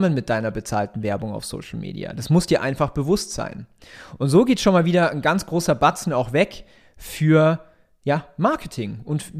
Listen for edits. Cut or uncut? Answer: uncut